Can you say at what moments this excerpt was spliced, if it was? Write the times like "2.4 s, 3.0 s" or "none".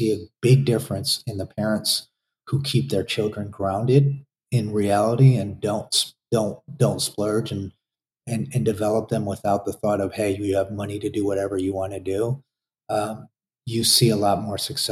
none